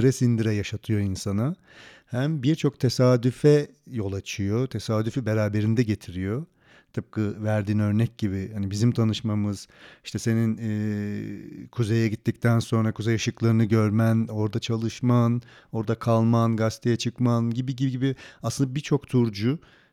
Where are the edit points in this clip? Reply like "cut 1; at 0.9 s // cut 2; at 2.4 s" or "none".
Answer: none